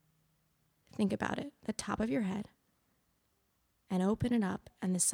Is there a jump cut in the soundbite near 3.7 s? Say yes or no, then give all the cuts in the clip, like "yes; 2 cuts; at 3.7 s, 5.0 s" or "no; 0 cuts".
no; 0 cuts